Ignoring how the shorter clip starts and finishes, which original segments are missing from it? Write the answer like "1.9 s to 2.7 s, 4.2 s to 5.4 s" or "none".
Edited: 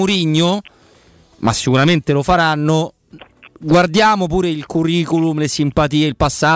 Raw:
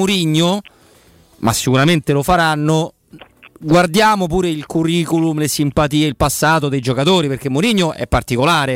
none